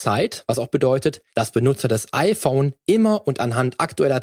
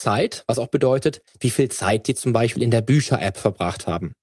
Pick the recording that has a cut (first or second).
second